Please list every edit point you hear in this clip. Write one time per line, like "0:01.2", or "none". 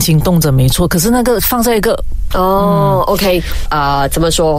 0:02.3
0:03.7